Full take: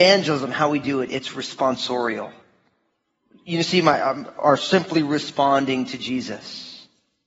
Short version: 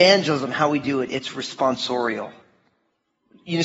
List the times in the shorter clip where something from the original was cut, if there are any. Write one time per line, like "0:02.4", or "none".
none

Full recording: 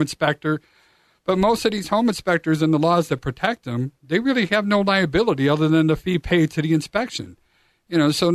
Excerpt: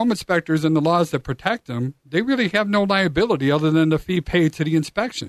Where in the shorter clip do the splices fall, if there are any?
none

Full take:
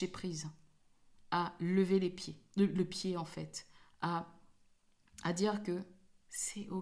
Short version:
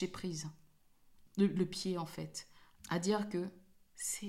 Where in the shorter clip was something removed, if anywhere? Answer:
0:01.3
0:02.8

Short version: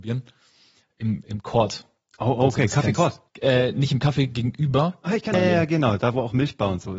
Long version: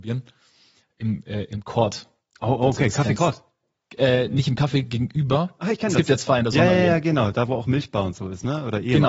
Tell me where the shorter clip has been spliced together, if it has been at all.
0:01.2
0:03.3
0:05.3

